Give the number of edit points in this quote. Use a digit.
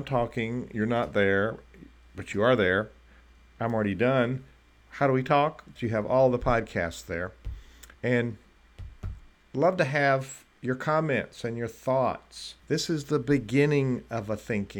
3